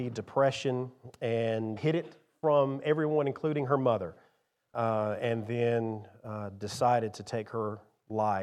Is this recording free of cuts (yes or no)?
no